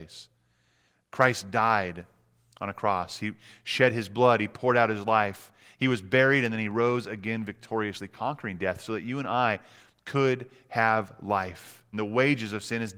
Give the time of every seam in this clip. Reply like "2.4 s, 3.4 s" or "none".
11.9 s